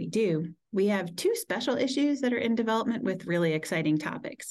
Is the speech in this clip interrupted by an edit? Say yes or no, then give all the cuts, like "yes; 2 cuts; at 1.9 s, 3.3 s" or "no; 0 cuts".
no; 0 cuts